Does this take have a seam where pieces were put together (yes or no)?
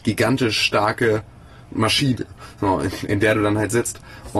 no